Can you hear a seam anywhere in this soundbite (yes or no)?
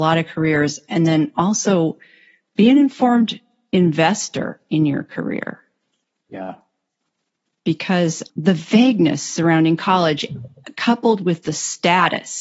yes